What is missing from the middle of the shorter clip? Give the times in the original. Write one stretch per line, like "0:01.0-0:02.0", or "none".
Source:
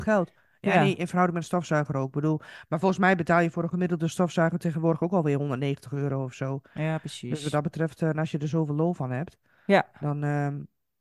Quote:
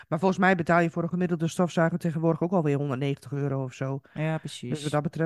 none